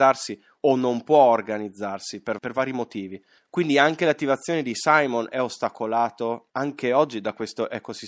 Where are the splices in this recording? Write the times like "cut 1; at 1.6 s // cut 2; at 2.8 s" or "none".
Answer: cut 1; at 2.4 s // cut 2; at 6.5 s